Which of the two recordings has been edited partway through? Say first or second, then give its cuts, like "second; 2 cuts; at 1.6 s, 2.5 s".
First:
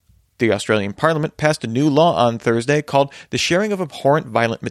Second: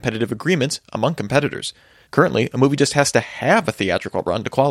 second; 1 cut; at 2.0 s